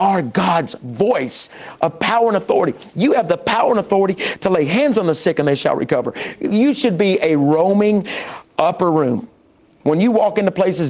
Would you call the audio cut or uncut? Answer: uncut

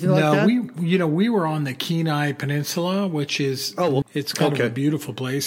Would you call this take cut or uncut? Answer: cut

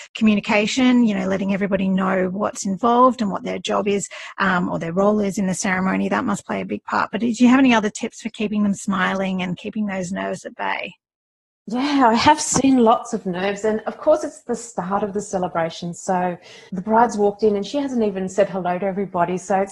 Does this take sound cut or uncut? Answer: uncut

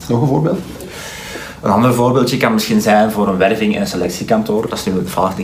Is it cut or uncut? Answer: uncut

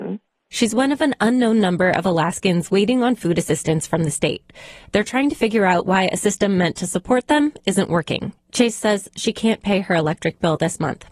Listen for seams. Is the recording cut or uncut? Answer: cut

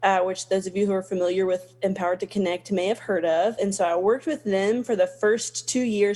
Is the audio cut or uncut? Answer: uncut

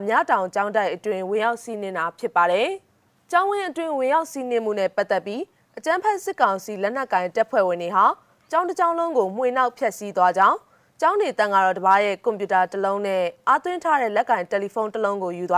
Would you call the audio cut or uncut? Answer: uncut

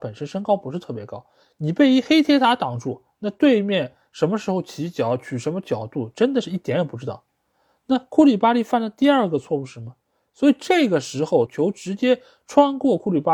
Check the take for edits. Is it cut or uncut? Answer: cut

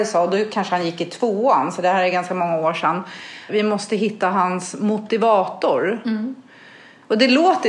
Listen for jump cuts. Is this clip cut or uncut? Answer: cut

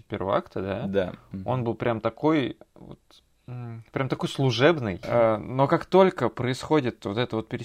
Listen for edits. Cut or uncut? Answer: cut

